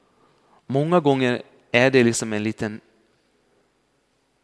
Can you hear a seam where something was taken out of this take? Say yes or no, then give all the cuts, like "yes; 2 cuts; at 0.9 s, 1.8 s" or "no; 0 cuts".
no; 0 cuts